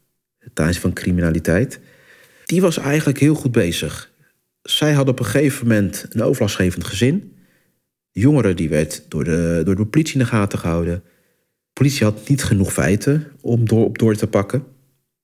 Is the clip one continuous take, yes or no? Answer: yes